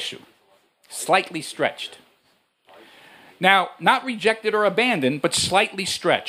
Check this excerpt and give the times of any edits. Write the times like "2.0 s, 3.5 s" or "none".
none

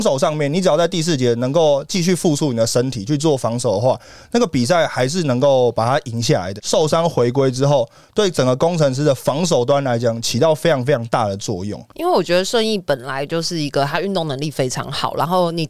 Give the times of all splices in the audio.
6.6 s

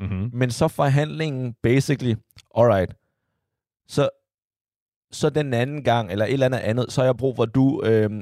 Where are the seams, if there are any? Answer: none

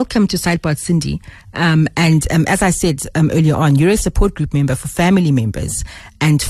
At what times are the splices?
none

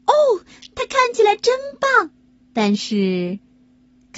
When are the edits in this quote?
2.4 s

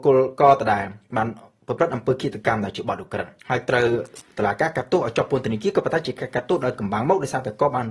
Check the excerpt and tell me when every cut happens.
3.4 s

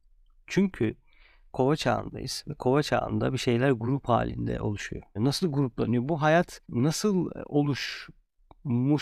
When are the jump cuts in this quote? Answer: 5.2 s, 6.6 s

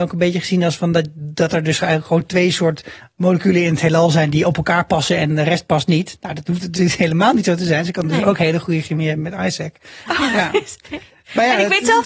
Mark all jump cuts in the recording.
10.1 s

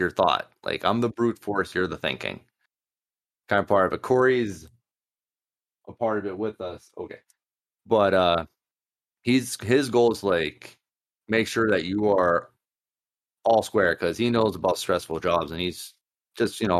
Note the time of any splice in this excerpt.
none

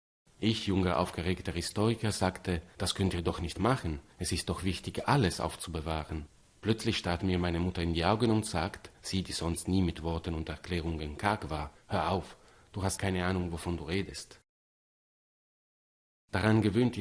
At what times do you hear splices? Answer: 13.0 s

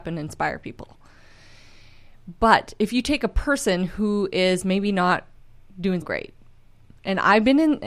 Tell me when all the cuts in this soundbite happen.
6.0 s

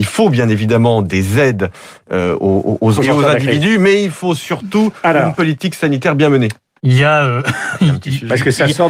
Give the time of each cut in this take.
3.0 s, 6.8 s

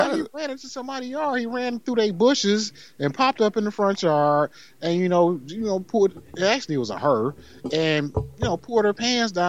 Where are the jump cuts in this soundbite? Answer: none

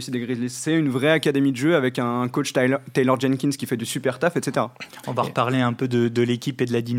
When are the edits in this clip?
none

